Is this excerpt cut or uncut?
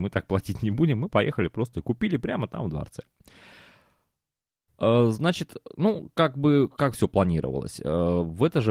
uncut